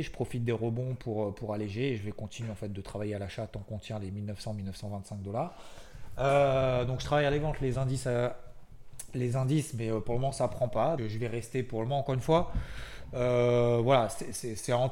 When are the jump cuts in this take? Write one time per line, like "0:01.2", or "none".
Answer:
0:11.0